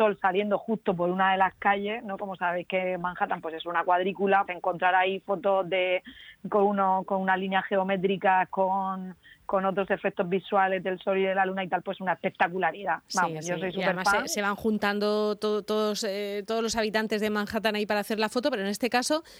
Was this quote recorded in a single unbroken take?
no; 1 cut; at 4.5 s

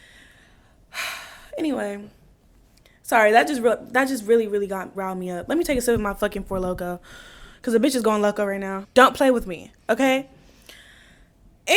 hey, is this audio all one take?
no; 2 cuts; at 4.9 s, 8.8 s

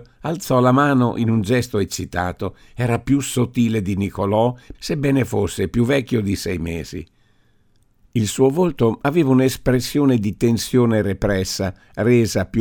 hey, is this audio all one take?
no; 1 cut; at 4.7 s

